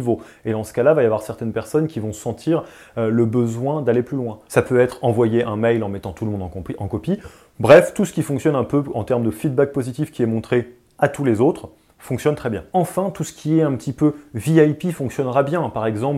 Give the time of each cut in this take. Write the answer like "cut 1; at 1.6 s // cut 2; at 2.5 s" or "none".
cut 1; at 4.5 s